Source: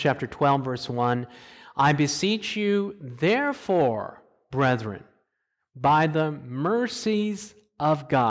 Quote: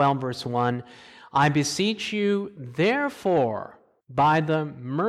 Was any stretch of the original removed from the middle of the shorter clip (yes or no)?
yes